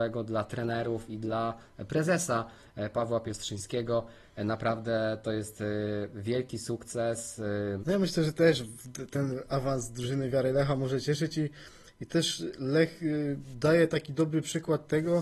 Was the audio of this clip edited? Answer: yes; 1 cut; at 7.8 s

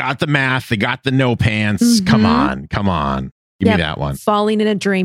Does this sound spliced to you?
no; 0 cuts

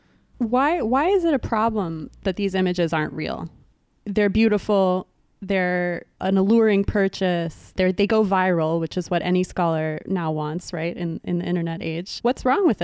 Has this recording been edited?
yes; 1 cut; at 7.7 s

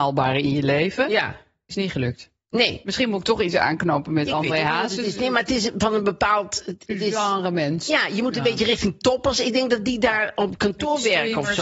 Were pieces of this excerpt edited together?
no; 0 cuts

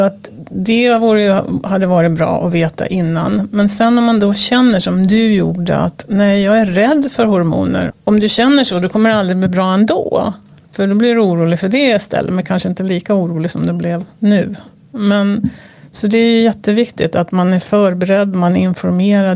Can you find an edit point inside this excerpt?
yes; 1 cut; at 7.9 s

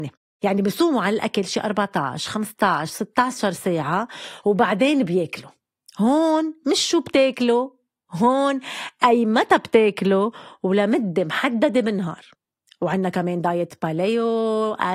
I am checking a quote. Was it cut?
no; 0 cuts

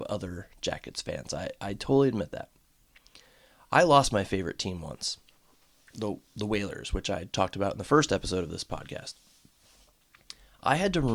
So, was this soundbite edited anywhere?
no; 0 cuts

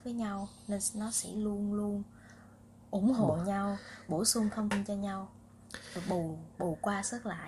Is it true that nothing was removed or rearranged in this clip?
yes; 0 cuts

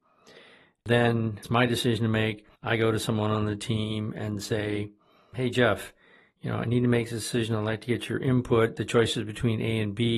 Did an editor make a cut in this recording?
yes; 1 cut; at 2.5 s

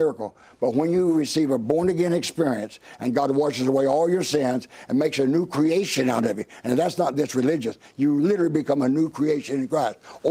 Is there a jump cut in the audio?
no; 0 cuts

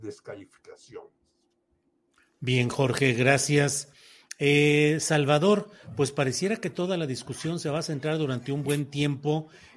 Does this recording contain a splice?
no; 0 cuts

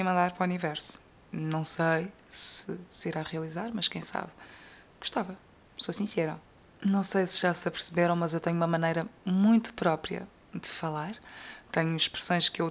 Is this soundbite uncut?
yes; 0 cuts

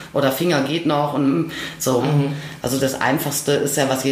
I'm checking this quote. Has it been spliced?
yes; 1 cut; at 2.0 s

